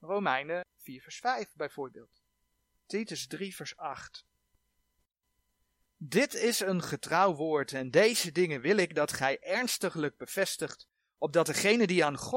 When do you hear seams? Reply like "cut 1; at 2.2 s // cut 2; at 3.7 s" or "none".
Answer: cut 1; at 2.8 s